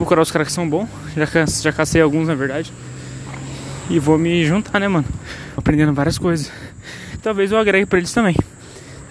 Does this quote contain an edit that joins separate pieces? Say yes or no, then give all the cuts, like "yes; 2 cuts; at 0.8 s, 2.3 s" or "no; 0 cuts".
yes; 2 cuts; at 5.6 s, 7.2 s